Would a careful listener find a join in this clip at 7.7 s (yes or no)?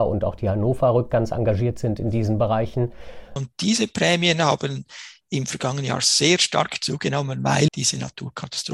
yes